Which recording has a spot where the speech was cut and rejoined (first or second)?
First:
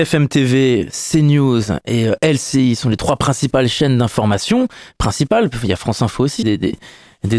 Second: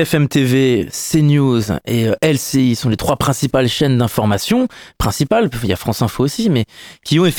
first